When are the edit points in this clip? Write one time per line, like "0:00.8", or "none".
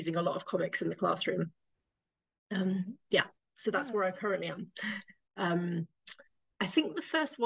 0:05.2

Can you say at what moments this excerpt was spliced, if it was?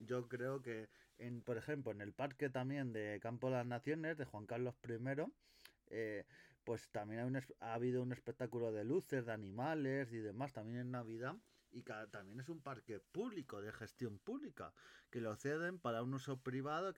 none

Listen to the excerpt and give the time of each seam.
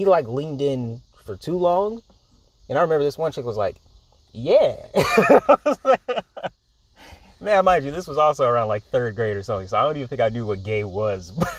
0:04.2

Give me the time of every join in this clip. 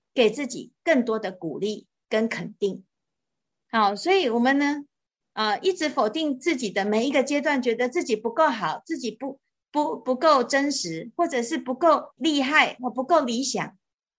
0:12.2

